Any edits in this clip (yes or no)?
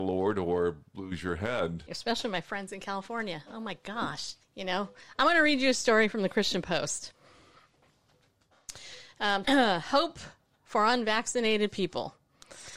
yes